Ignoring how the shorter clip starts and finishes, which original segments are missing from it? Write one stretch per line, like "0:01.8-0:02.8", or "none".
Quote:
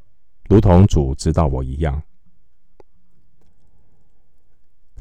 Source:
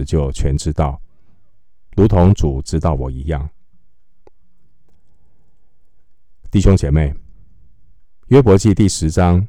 none